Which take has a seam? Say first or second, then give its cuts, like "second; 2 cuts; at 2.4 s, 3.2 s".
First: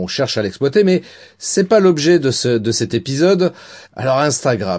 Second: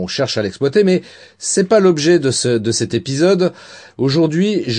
first; 1 cut; at 3.8 s